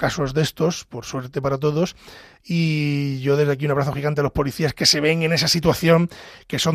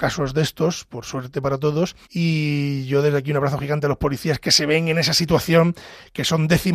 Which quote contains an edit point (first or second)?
second